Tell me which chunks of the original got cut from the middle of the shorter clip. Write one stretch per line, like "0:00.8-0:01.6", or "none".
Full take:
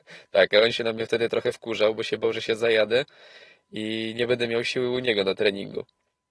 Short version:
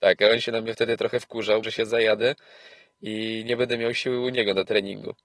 0:02.0-0:02.3

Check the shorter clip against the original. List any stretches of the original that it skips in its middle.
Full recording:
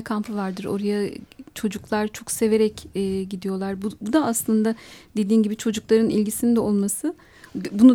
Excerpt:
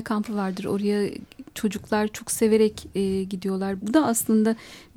0:03.8-0:04.0

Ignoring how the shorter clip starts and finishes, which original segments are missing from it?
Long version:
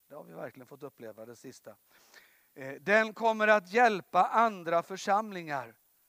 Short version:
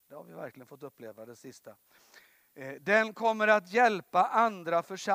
none

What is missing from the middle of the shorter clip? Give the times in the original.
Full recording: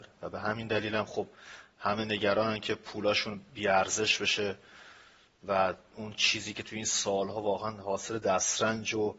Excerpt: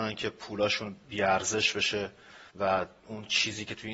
0:05.0-0:05.4

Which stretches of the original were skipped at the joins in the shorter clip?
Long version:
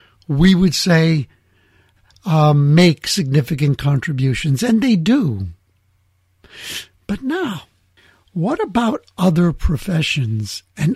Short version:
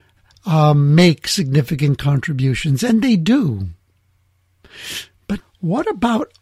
0:07.2-0:08.1

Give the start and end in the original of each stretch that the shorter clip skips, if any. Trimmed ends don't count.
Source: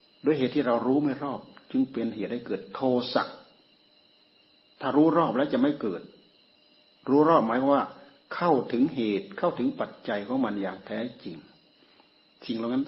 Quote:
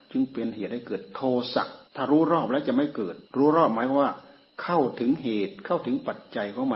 0:03.5-0:04.7
0:06.1-0:07.0

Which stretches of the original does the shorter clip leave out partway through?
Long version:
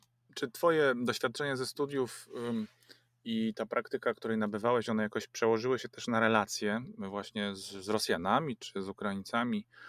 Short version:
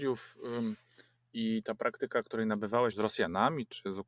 0:04.8-0:07.8

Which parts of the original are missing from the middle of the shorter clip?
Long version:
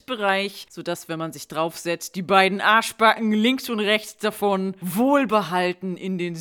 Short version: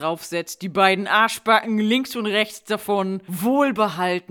none

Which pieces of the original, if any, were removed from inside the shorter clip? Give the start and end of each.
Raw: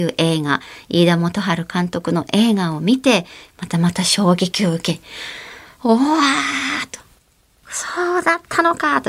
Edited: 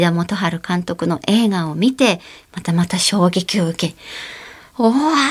none

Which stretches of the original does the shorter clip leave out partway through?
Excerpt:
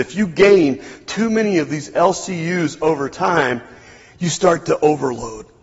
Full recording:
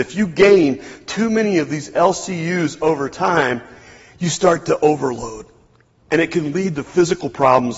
none

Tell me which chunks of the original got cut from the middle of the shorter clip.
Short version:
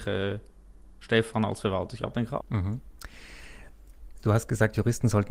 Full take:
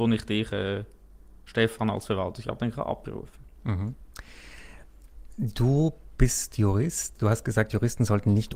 0:02.9-0:03.5
0:05.3-0:07.2

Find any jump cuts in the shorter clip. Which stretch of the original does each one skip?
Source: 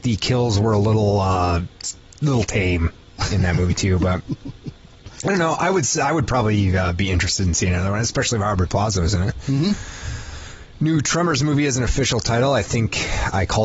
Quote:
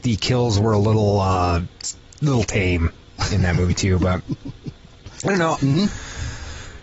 0:05.6-0:09.4

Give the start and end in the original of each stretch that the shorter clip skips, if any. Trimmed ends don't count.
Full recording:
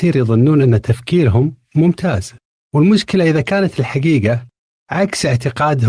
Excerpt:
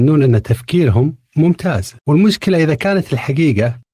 0:02.4-0:02.7

